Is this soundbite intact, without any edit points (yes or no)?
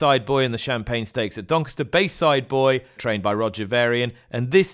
no